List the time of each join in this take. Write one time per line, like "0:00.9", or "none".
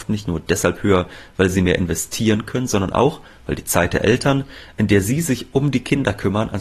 none